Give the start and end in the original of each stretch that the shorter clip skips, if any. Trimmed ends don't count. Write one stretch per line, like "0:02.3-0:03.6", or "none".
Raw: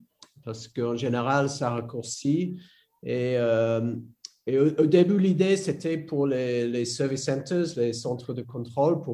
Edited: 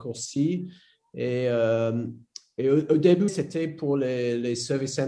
0:05.2-0:05.6